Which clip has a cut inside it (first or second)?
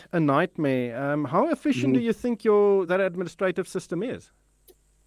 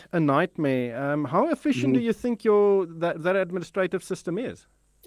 first